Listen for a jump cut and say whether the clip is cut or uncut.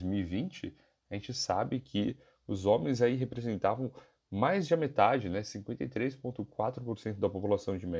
uncut